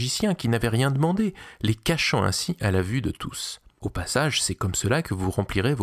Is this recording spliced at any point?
no; 0 cuts

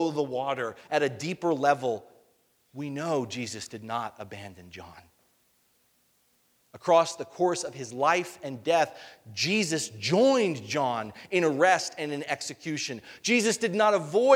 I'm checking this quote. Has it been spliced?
no; 0 cuts

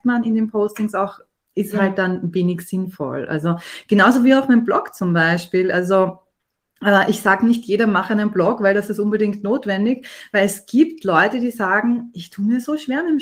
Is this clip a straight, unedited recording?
yes; 0 cuts

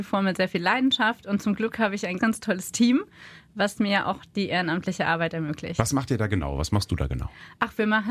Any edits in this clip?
yes; 1 cut; at 2.2 s

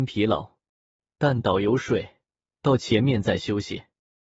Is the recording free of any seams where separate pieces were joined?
yes; 0 cuts

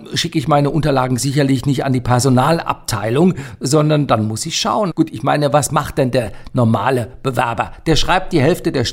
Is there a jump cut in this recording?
yes; 1 cut; at 4.9 s

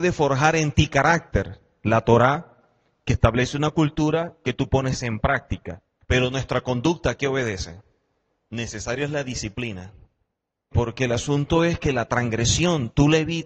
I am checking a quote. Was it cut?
yes; 3 cuts; at 6.0 s, 8.4 s, 10.7 s

